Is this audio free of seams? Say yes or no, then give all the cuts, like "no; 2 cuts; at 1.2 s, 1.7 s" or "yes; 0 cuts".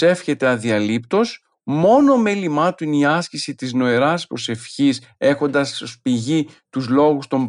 yes; 0 cuts